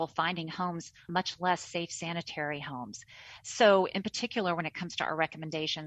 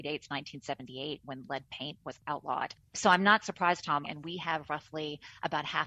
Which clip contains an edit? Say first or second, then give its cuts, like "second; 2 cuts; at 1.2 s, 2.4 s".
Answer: second; 1 cut; at 4.0 s